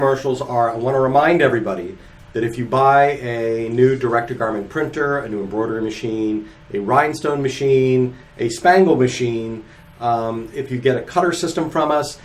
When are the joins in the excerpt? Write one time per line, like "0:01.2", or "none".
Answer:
0:10.5